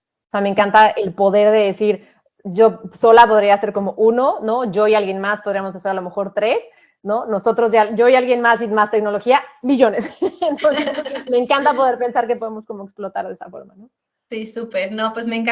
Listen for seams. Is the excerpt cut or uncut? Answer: uncut